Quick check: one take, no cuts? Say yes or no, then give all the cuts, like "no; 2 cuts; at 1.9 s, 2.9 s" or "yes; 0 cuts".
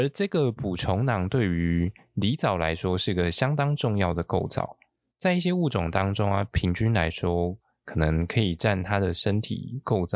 yes; 0 cuts